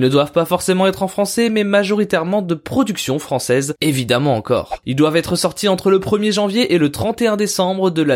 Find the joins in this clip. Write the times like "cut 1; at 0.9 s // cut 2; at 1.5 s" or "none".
cut 1; at 3.8 s